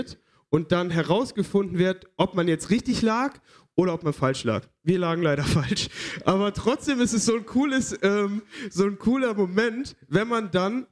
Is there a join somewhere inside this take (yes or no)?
no